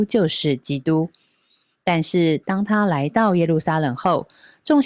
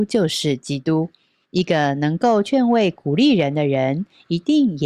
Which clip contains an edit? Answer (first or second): second